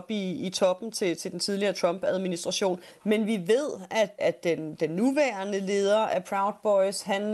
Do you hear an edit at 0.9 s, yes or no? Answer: no